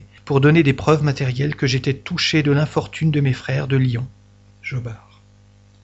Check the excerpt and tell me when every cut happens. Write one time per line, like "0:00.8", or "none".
0:04.5